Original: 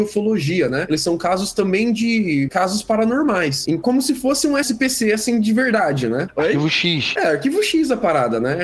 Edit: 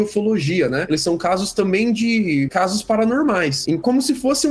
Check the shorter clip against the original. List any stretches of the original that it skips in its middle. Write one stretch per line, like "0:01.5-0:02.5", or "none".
none